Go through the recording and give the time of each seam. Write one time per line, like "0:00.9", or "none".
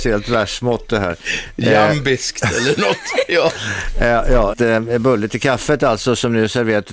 0:04.5

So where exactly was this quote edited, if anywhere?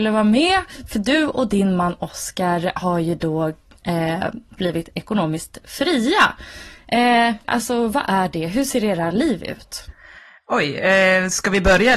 0:07.4

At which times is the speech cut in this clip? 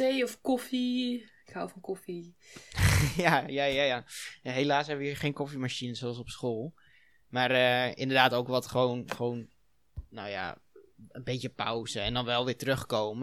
none

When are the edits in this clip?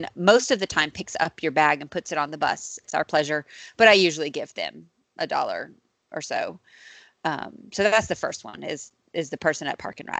0:02.8

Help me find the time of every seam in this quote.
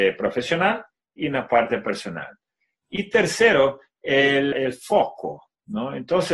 0:04.5

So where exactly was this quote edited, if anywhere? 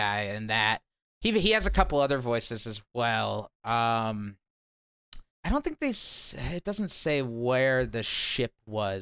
0:05.3

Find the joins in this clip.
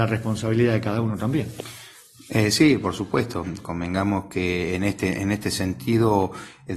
none

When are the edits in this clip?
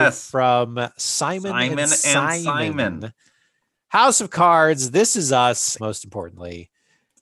0:05.8

